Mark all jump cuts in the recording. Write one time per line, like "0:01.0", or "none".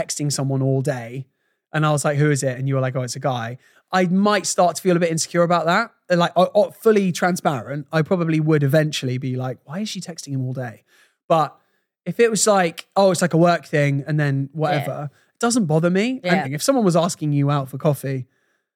0:16.4

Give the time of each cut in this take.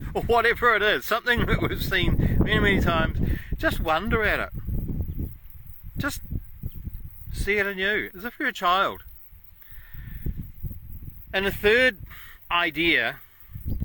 0:08.1

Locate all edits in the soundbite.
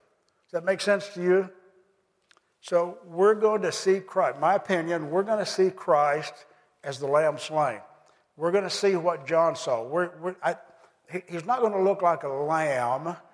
none

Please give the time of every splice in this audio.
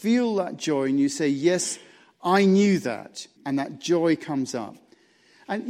0:03.4

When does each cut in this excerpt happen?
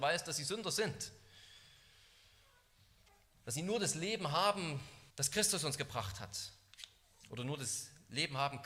0:05.1

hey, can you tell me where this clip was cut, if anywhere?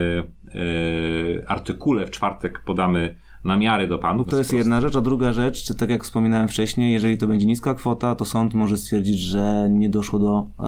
0:04.2

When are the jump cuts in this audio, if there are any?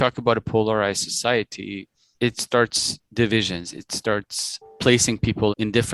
none

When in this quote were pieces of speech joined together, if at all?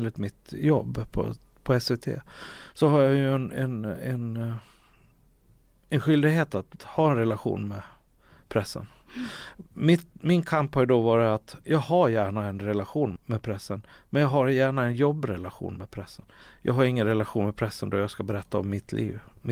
0:13.2

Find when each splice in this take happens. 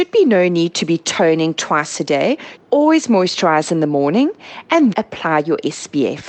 0:02.6
0:04.9

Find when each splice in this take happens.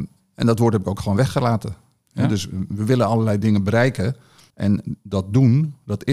0:02.0
0:04.5

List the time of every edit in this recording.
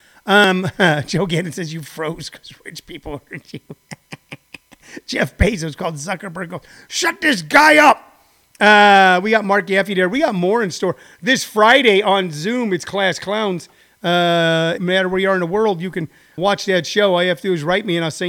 0:14.8
0:16.4

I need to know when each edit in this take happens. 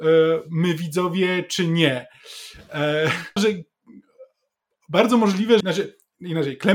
0:03.4
0:05.6

